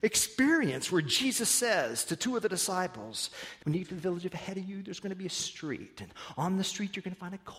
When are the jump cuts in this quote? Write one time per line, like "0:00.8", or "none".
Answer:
0:03.6

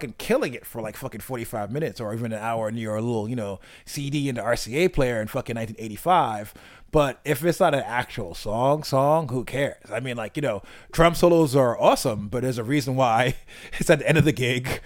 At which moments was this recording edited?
none

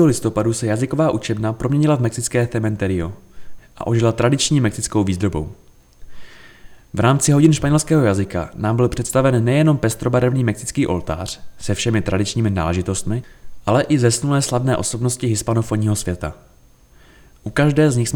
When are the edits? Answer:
0:03.6

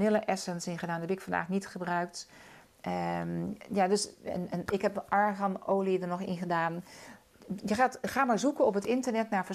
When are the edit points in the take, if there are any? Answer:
none

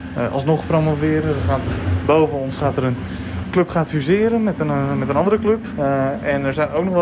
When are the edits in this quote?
0:05.7

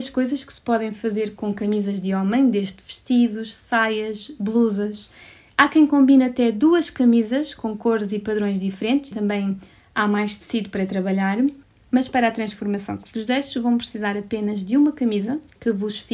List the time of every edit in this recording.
0:09.1

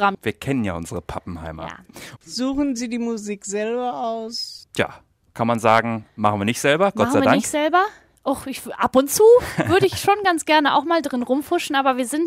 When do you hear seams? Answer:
0:02.2

